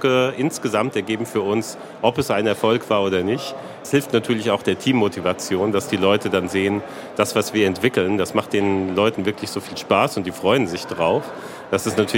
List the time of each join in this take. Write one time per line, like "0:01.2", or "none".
none